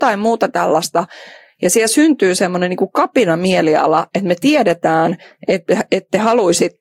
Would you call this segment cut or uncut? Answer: uncut